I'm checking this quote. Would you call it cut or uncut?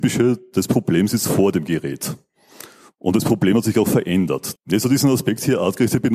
cut